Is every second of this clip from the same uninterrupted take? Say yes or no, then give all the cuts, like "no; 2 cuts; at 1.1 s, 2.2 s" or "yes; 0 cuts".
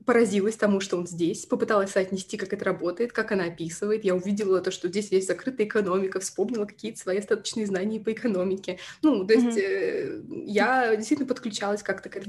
yes; 0 cuts